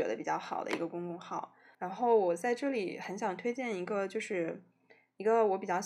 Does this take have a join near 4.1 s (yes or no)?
no